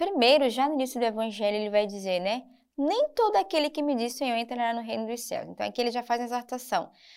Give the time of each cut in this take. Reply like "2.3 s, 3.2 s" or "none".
4.1 s

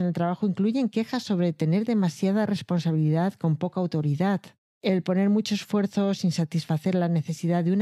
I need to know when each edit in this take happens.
4.7 s

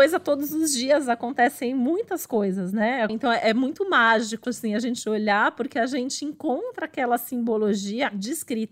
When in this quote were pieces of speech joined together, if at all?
3.1 s, 4.4 s

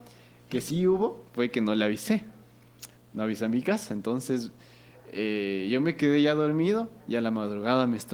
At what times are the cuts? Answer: none

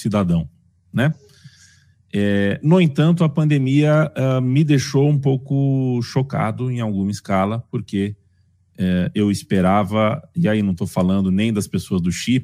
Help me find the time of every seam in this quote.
none

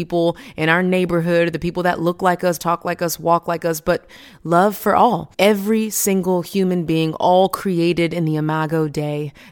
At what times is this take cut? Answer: 2.6 s, 5.3 s

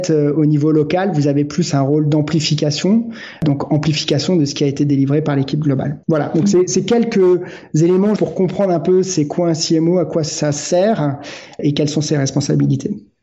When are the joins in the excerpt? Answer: 6.0 s, 8.2 s

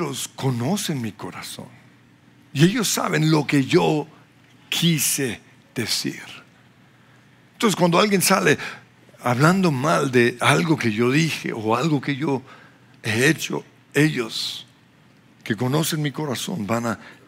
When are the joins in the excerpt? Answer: none

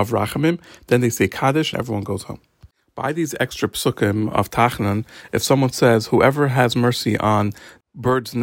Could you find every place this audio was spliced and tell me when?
1.7 s

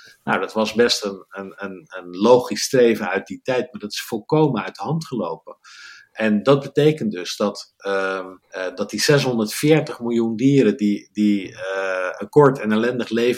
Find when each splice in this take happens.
8.4 s

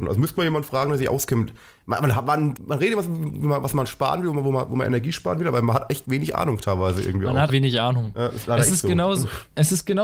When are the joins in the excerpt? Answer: 2.6 s, 7.5 s

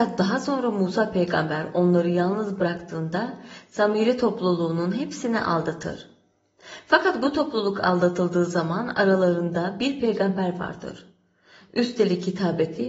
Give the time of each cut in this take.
none

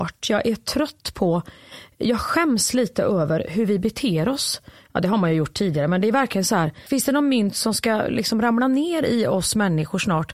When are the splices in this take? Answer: none

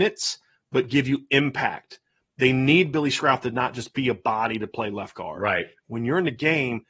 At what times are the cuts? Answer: 5.8 s

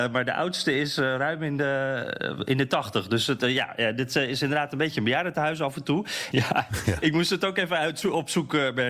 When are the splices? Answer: 6.3 s

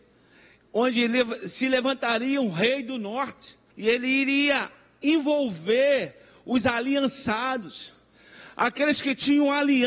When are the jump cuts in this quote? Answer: 3.7 s

